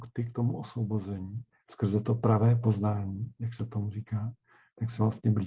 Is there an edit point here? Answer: no; 0 cuts

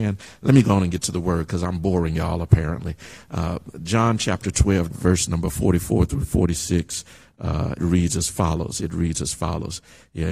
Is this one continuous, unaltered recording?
no; 2 cuts; at 4.9 s, 7.8 s

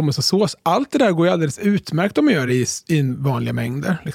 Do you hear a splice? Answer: no; 0 cuts

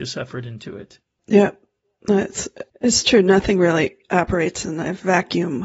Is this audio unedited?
no; 2 cuts; at 1.2 s, 2.7 s

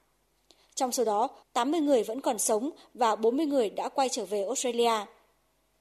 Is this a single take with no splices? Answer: no; 1 cut; at 1.4 s

